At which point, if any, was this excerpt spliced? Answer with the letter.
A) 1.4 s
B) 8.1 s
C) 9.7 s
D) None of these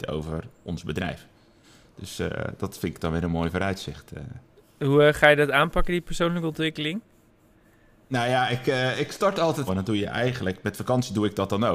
C